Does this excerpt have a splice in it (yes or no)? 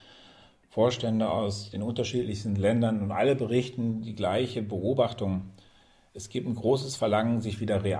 no